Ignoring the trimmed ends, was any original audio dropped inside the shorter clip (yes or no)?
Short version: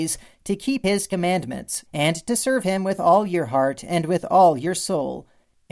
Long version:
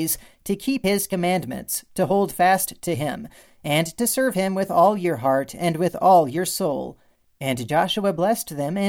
yes